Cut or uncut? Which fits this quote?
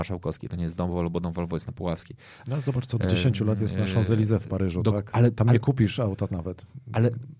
cut